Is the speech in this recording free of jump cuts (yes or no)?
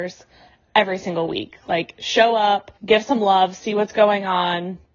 no